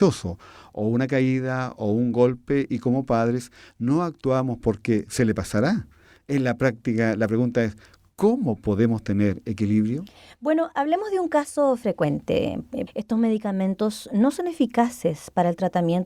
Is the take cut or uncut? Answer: cut